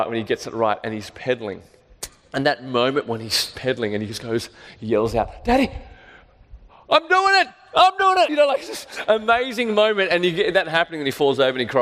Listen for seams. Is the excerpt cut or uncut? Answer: cut